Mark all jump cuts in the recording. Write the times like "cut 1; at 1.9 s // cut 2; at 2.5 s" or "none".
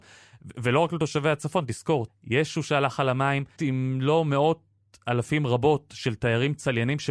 cut 1; at 2.1 s // cut 2; at 3.6 s